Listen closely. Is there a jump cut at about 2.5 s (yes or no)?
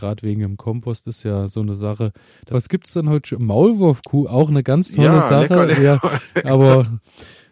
yes